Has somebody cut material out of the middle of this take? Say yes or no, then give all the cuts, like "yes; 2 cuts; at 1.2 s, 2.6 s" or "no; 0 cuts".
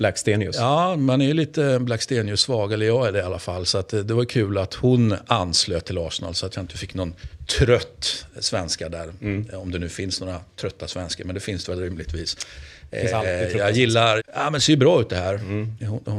yes; 1 cut; at 14.2 s